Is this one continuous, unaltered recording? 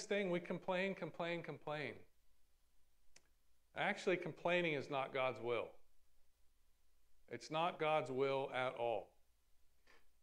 yes; 0 cuts

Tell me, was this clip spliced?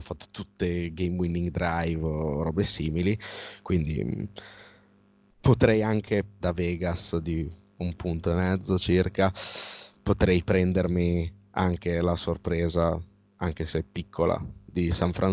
yes; 1 cut; at 6.4 s

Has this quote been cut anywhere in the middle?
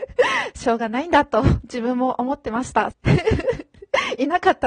yes; 1 cut; at 2.9 s

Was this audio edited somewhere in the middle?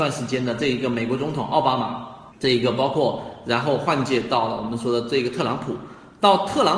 yes; 1 cut; at 2.3 s

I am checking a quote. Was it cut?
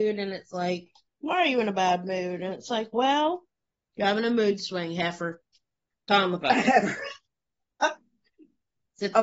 no; 0 cuts

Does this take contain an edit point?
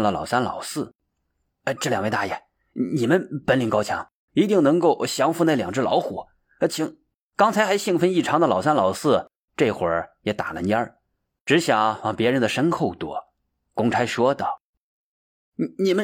no; 0 cuts

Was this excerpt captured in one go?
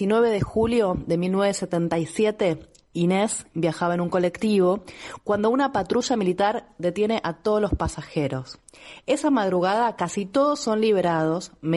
yes; 0 cuts

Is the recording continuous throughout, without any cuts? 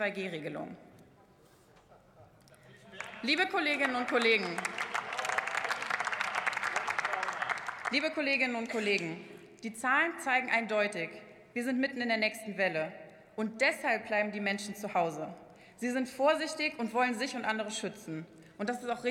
yes; 0 cuts

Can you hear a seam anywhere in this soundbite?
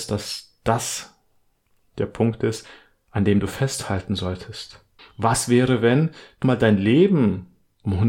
yes; 2 cuts; at 5.0 s, 6.4 s

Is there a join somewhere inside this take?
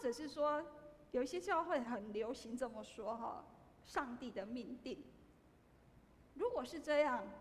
yes; 2 cuts; at 1.8 s, 6.3 s

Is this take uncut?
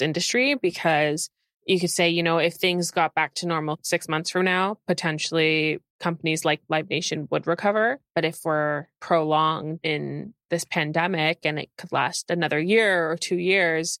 yes; 0 cuts

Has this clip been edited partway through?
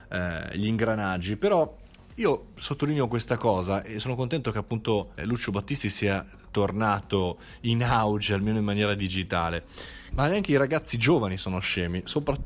yes; 2 cuts; at 5.2 s, 10.1 s

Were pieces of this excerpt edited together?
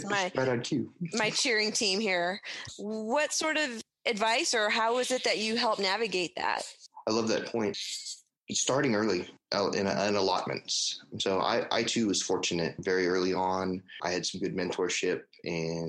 no; 0 cuts

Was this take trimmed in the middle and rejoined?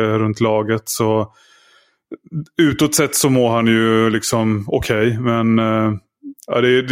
no; 0 cuts

